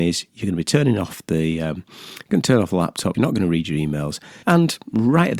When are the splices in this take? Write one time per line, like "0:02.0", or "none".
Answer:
0:03.1
0:04.4

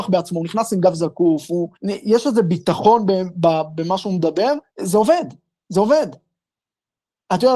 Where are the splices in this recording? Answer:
0:01.8
0:04.7

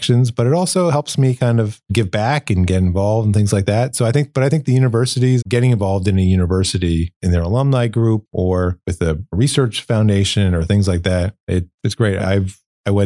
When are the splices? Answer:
0:05.4

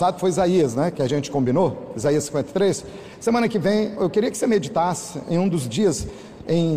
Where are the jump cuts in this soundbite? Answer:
0:04.0

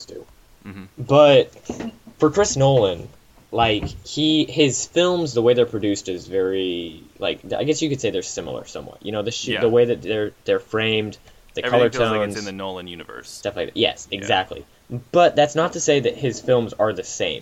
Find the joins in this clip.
none

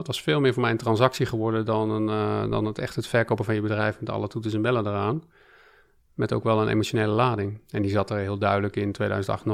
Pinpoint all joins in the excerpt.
none

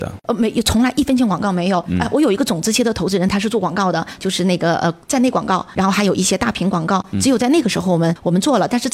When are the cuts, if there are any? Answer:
0:04.2
0:05.8

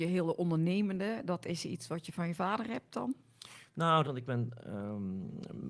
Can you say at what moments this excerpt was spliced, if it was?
0:04.0

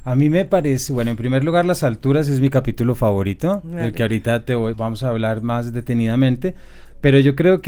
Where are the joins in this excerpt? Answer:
0:04.7

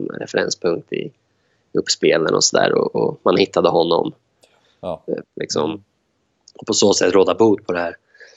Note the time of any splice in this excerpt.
0:05.2

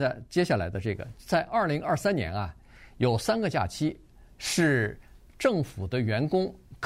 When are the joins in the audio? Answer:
none

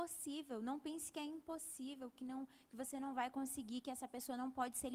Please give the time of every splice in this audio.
none

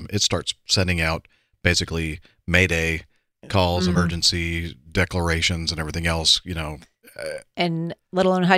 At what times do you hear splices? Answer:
none

